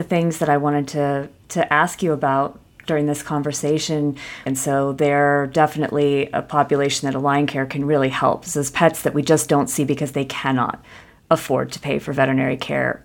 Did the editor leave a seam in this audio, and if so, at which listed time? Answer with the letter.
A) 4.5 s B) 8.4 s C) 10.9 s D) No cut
A